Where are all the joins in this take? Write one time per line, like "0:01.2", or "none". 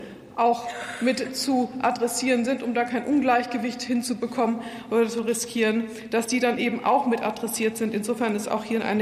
none